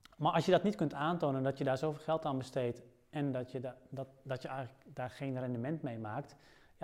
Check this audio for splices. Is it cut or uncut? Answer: uncut